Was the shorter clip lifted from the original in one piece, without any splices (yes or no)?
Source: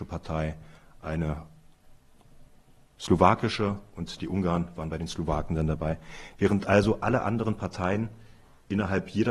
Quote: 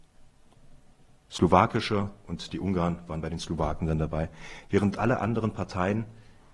no